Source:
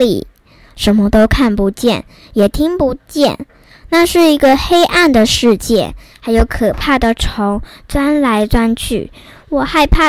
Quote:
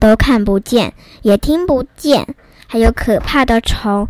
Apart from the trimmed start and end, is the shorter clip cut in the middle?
yes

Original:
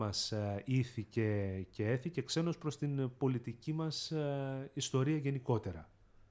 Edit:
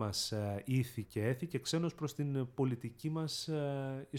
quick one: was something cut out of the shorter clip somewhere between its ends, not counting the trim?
yes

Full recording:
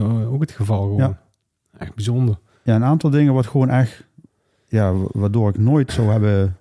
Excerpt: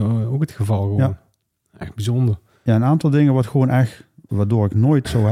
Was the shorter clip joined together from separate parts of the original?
yes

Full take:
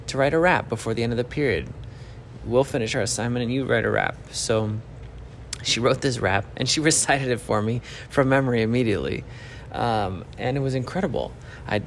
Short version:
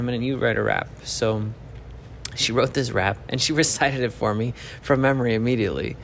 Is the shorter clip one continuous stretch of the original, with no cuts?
yes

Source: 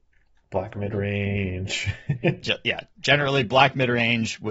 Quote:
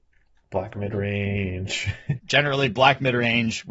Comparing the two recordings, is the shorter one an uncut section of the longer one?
no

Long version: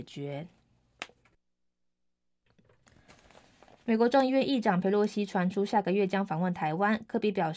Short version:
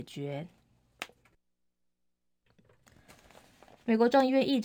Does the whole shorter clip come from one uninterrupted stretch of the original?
yes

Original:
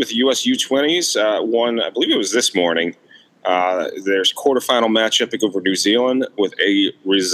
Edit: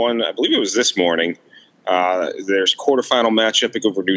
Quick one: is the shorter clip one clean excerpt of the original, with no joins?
yes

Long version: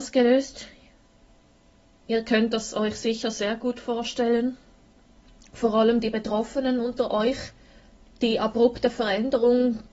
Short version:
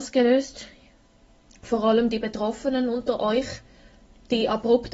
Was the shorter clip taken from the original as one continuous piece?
no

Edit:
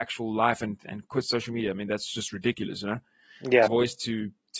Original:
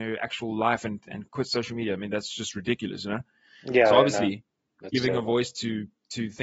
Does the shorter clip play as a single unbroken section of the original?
no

